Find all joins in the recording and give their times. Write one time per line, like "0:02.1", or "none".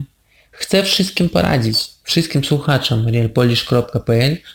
none